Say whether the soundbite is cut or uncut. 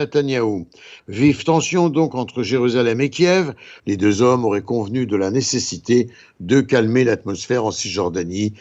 cut